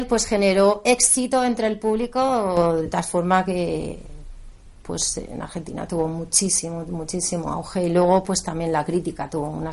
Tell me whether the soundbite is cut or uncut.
uncut